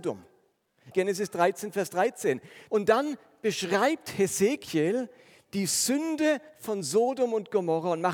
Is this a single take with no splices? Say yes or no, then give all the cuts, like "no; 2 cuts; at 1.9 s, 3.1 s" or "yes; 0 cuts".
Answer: no; 2 cuts; at 0.9 s, 2.7 s